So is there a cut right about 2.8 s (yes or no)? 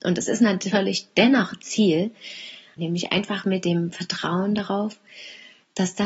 yes